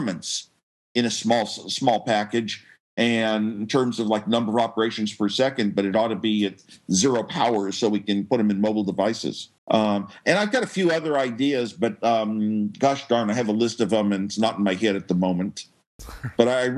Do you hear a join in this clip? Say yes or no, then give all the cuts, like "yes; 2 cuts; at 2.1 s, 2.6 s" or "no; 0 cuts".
yes; 1 cut; at 9.6 s